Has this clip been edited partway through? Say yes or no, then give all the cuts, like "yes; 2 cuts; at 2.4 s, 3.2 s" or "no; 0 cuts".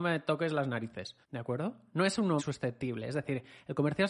yes; 2 cuts; at 1.2 s, 2.4 s